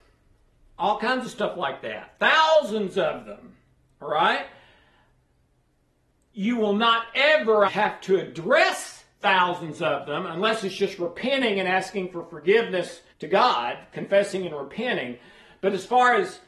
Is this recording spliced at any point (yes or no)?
yes